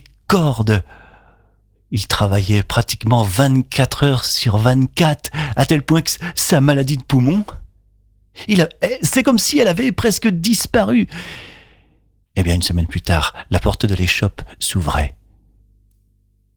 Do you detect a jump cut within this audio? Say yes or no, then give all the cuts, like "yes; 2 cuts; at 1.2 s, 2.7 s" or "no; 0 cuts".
yes; 1 cut; at 12.2 s